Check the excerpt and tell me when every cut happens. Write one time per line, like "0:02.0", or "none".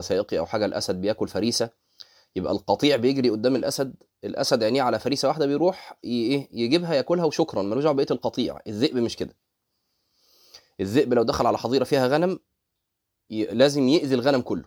none